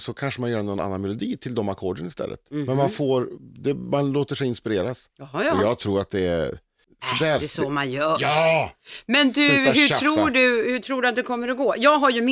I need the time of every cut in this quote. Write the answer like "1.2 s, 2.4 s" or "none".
none